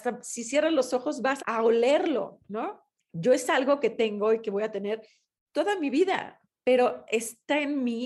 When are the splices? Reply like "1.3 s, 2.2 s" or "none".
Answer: 1.4 s, 2.9 s